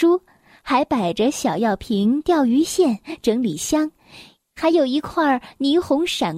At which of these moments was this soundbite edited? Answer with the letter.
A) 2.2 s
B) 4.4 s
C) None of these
B